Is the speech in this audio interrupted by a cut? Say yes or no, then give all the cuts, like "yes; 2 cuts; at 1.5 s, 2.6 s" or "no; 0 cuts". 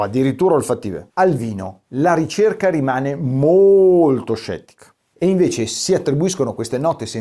no; 0 cuts